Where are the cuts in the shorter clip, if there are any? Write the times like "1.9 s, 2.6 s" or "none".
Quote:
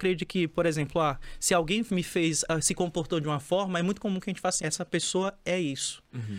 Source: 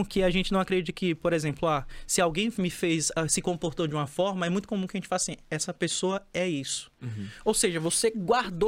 4.6 s